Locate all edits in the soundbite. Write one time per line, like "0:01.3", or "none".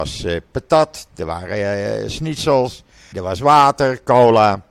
0:03.1